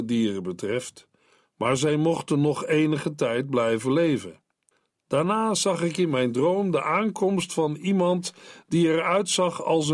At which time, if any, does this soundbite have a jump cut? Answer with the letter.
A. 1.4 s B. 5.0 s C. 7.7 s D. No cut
A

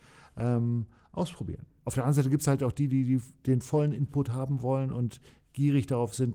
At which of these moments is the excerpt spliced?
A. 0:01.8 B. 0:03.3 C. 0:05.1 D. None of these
A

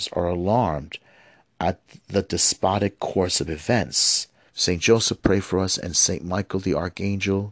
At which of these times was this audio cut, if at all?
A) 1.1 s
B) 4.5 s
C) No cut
B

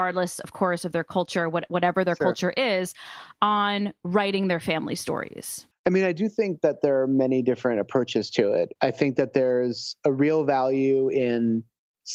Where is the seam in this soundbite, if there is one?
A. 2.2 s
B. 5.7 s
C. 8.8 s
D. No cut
B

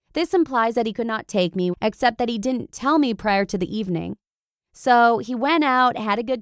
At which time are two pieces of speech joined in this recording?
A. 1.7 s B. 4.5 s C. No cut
A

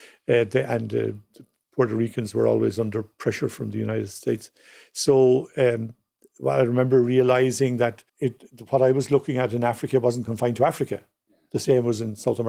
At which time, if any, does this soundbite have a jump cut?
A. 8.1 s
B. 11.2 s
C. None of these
A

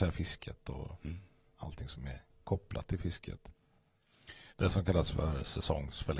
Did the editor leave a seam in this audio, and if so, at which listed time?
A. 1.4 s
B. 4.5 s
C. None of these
B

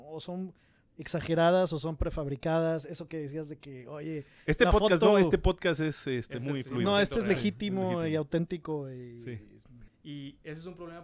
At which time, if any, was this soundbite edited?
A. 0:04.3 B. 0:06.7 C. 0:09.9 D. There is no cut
C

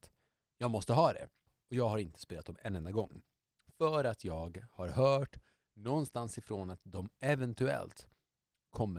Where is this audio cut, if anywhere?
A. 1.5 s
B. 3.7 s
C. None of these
A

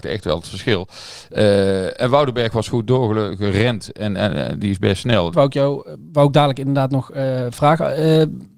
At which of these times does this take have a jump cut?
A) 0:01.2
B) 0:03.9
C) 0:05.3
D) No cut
C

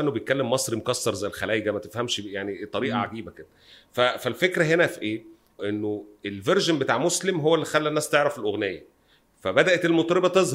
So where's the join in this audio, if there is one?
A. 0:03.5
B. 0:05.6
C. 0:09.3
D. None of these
B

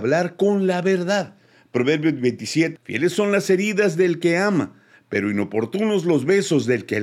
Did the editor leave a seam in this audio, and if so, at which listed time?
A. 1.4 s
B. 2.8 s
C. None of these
B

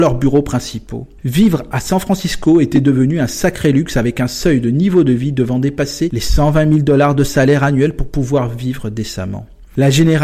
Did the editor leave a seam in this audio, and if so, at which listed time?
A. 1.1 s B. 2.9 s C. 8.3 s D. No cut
D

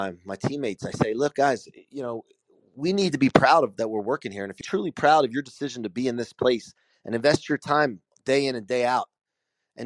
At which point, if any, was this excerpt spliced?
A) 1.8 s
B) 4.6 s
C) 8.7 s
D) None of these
B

